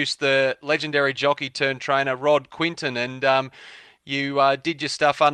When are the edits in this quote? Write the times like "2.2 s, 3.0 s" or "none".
none